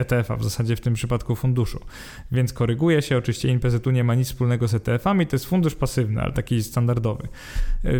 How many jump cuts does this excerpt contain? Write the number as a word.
zero